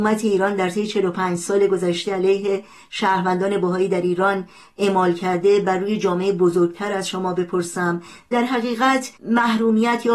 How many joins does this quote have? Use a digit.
1